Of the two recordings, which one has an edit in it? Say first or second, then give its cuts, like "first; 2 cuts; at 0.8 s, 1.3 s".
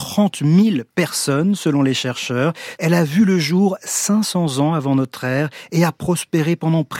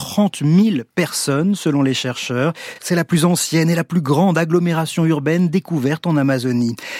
first; 1 cut; at 2.8 s